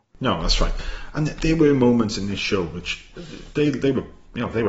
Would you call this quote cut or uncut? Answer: uncut